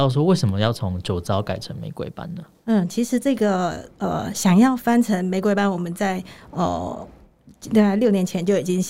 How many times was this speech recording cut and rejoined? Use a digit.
1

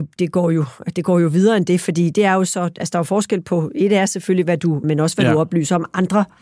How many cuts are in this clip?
1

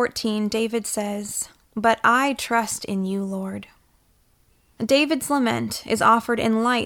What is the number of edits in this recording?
1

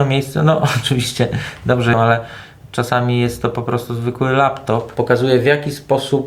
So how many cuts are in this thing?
2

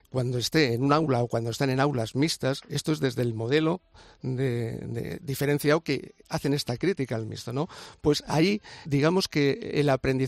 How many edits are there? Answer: 1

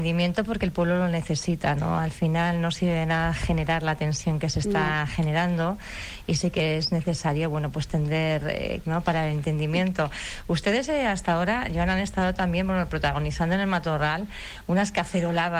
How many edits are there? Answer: 1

